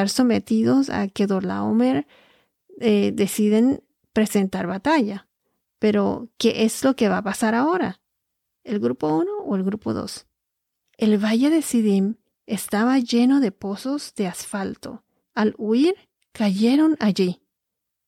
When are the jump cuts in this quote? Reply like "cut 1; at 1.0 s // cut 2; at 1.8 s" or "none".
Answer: cut 1; at 8.5 s // cut 2; at 10.9 s // cut 3; at 15.2 s